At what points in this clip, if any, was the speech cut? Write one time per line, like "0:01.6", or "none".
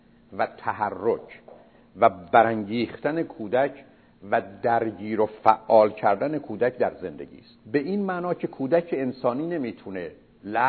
0:07.6

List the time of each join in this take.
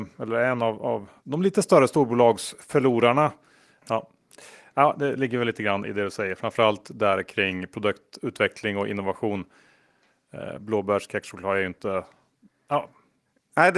0:03.8

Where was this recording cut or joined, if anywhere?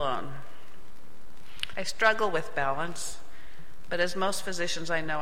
0:01.7

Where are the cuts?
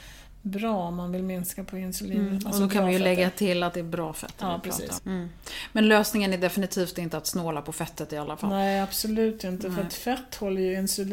0:05.0

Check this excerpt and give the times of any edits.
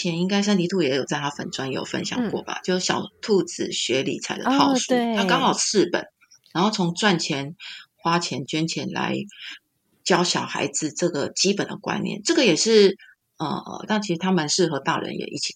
0:08.5
0:13.9

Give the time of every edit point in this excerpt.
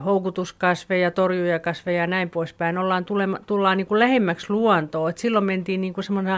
none

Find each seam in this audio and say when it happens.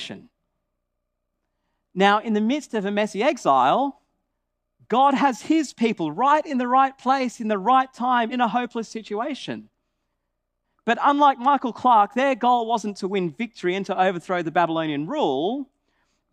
0:08.3

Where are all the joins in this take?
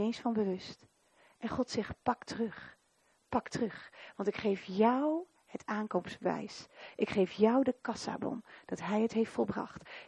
none

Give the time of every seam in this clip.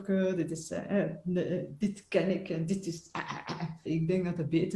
0:03.9

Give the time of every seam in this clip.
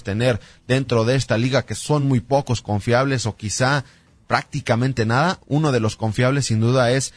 none

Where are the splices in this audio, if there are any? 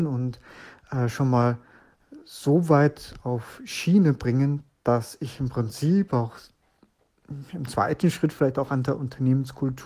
none

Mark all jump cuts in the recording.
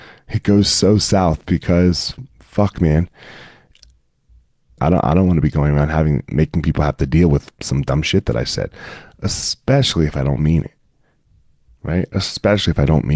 0:04.8

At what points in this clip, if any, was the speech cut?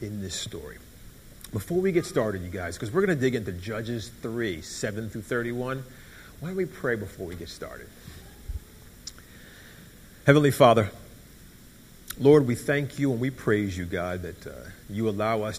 none

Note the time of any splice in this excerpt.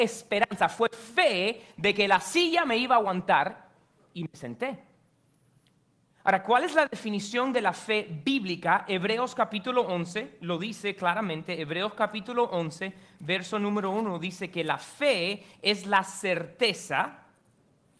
none

